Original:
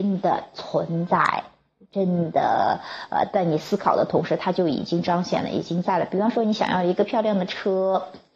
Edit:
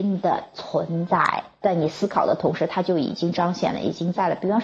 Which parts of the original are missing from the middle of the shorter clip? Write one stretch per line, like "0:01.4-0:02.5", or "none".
0:01.6-0:03.3